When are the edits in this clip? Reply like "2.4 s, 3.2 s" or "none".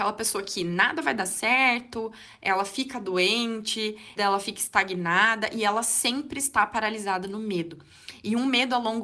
4.2 s

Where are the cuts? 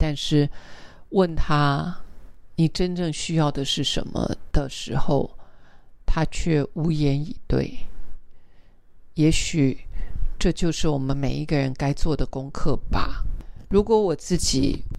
none

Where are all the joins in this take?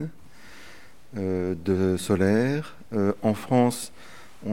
none

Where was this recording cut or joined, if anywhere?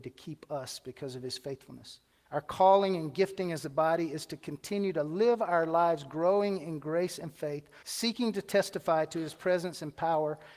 2.3 s, 7.8 s

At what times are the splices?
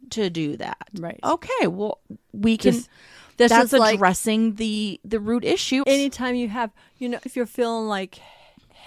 5.8 s, 7.3 s

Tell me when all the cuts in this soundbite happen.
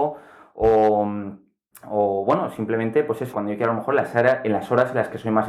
3.3 s

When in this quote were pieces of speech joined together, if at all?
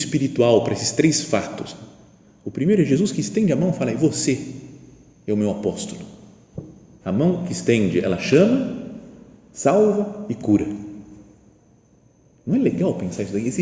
7.0 s

